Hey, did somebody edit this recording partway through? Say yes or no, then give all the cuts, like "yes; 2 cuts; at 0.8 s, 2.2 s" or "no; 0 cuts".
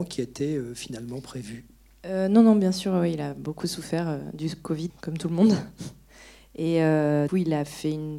yes; 2 cuts; at 4.9 s, 7.3 s